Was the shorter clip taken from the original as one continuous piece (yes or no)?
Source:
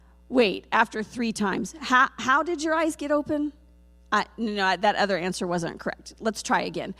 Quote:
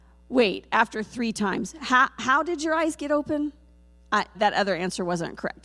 no